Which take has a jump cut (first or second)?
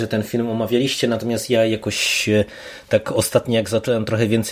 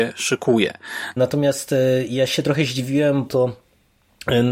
second